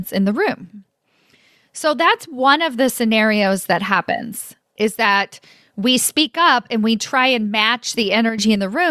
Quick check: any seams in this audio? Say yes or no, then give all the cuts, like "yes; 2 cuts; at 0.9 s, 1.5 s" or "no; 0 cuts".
no; 0 cuts